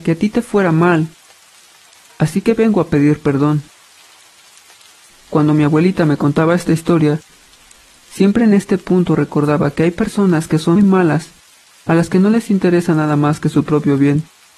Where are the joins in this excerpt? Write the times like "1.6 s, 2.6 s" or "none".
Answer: 10.8 s